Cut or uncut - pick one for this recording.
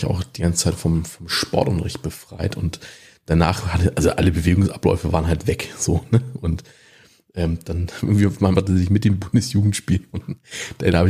cut